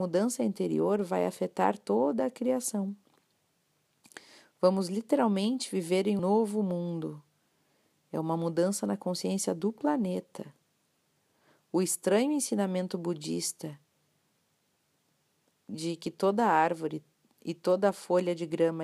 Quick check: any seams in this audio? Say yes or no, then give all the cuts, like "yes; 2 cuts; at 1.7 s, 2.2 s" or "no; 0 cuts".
yes; 1 cut; at 6.2 s